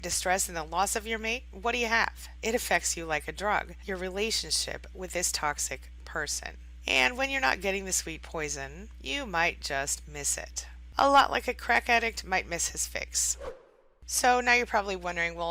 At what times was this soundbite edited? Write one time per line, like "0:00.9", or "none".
none